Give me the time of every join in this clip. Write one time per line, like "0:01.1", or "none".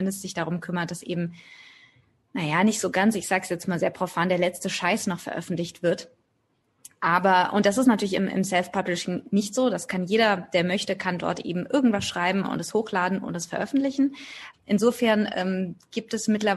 0:14.5